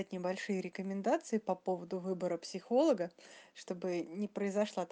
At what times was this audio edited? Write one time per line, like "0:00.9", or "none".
none